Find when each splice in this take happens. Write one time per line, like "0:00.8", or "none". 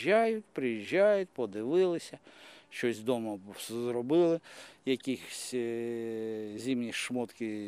none